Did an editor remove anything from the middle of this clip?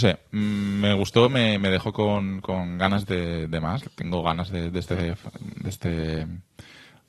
yes; 1 cut; at 3.8 s

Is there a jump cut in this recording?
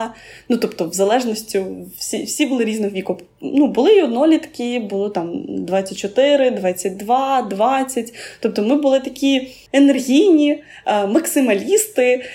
no; 0 cuts

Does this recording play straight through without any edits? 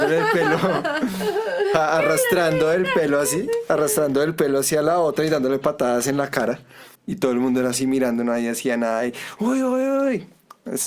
no; 1 cut; at 7.0 s

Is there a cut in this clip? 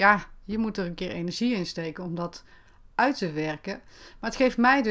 no; 0 cuts

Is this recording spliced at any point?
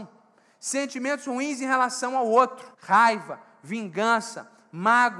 yes; 1 cut; at 2.7 s

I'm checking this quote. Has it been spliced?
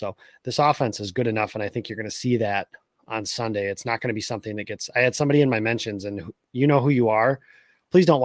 no; 0 cuts

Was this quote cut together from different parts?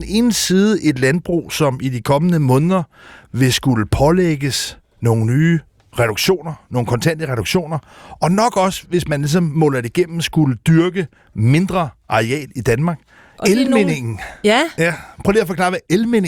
yes; 1 cut; at 13.4 s

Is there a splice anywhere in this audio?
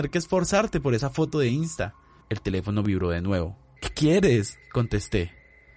yes; 2 cuts; at 2.2 s, 3.8 s

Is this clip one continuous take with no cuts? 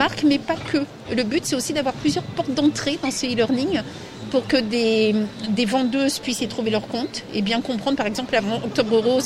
yes; 0 cuts

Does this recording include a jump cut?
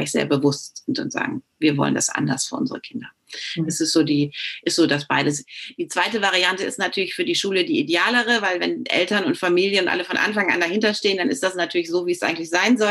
no; 0 cuts

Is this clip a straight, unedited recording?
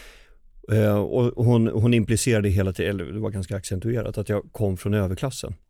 yes; 0 cuts

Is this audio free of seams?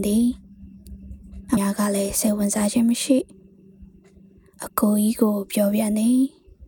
no; 1 cut; at 1.6 s

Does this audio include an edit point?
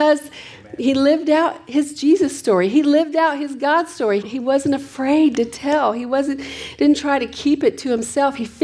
yes; 1 cut; at 4.2 s

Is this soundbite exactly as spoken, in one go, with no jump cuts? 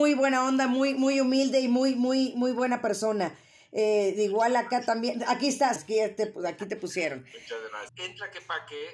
no; 2 cuts; at 5.8 s, 7.9 s

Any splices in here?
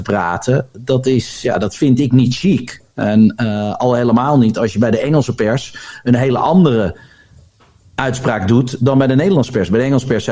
no; 0 cuts

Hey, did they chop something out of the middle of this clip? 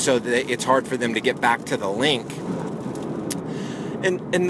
yes; 1 cut; at 3.4 s

